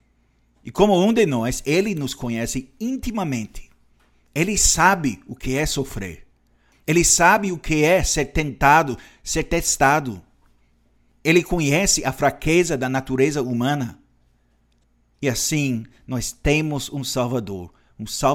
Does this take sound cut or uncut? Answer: uncut